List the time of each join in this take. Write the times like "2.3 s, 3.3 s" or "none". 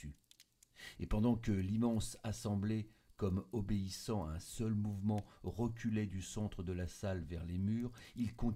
1.0 s